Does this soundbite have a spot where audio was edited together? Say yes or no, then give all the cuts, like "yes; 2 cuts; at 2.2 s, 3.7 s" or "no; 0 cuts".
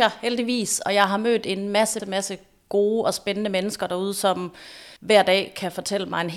yes; 2 cuts; at 2.0 s, 5.0 s